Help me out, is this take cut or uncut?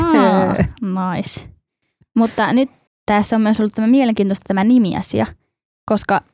cut